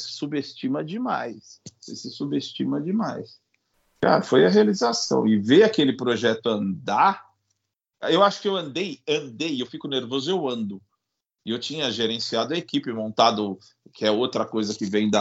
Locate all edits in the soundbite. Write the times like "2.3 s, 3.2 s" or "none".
none